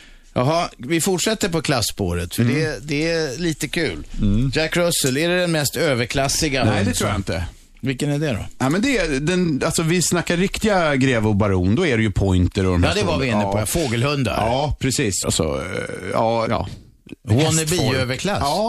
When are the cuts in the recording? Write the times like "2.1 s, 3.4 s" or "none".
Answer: 15.2 s, 16.5 s